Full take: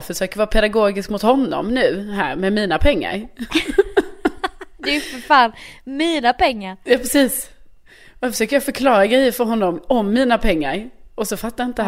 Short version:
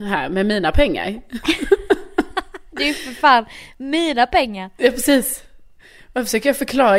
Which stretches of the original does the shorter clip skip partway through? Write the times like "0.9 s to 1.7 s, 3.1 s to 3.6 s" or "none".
none